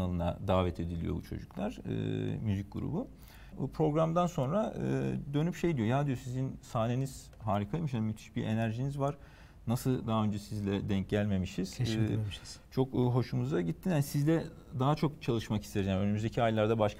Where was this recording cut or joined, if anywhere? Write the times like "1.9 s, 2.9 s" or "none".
3.5 s